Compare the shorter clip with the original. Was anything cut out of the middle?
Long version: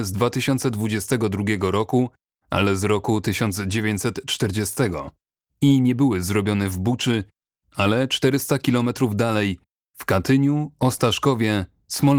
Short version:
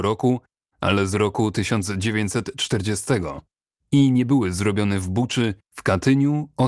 yes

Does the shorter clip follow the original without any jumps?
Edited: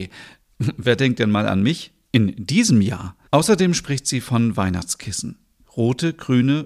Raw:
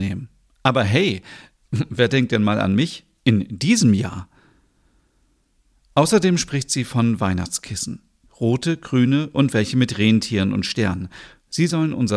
no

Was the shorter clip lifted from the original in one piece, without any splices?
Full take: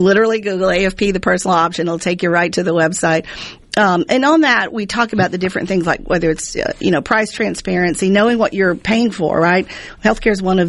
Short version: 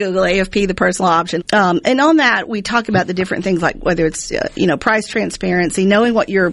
no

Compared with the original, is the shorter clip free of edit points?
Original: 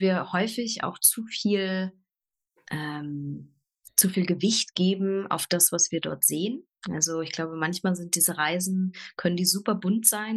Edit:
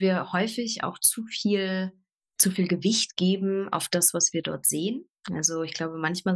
no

